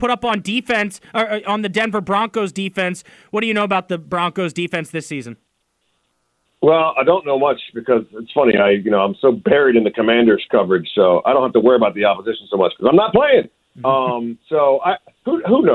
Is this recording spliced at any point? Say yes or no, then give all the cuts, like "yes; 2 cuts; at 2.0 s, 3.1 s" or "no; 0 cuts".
no; 0 cuts